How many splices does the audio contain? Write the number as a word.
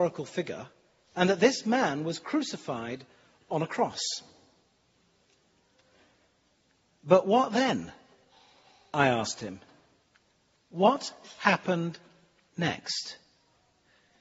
zero